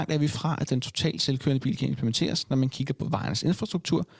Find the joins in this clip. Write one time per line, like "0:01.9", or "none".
none